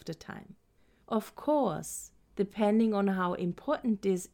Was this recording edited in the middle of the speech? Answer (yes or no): yes